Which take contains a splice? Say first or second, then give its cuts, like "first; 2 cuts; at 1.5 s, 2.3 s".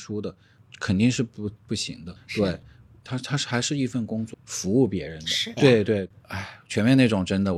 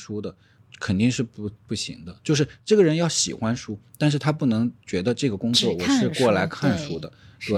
first; 3 cuts; at 2.2 s, 4.3 s, 5.6 s